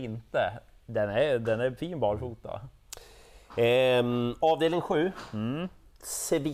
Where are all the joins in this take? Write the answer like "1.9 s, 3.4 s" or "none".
none